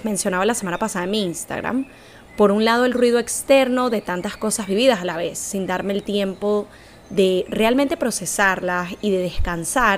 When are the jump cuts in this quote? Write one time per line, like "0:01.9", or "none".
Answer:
none